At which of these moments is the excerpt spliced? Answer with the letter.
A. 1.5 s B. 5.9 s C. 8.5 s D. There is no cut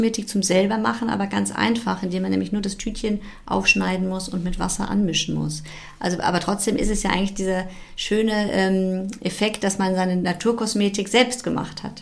D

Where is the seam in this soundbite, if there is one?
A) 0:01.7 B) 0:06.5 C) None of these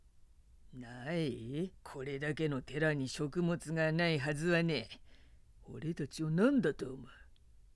A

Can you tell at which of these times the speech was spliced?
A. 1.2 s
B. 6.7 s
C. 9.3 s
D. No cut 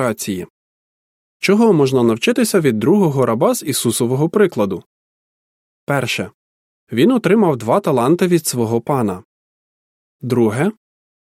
D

